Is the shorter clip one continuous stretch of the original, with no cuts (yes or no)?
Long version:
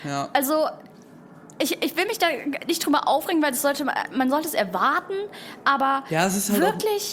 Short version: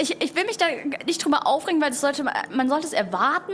yes